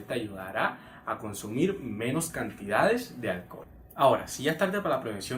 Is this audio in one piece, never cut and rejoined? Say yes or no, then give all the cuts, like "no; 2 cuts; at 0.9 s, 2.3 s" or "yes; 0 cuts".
yes; 0 cuts